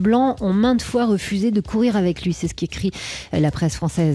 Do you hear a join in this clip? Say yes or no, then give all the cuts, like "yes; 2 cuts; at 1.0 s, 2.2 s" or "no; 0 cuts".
no; 0 cuts